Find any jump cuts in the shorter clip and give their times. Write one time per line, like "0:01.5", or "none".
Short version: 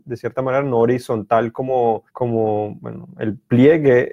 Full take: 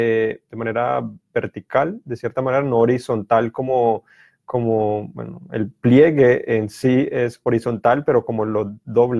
0:02.1